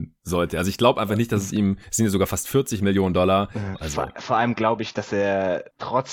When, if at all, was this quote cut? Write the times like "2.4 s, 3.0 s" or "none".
3.7 s